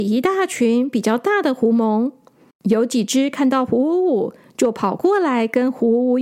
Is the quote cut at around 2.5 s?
yes; 1 cut; at 2.5 s

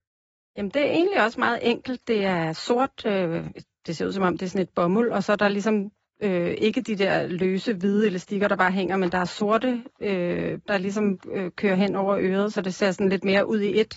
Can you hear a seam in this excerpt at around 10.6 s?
yes; 1 cut; at 10.6 s

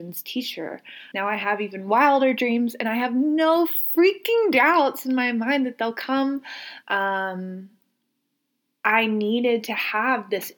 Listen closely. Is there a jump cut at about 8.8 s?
no; 2 cuts; at 1.1 s, 6.8 s

